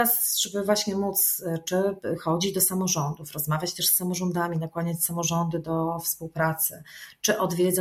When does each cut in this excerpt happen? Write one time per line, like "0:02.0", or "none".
none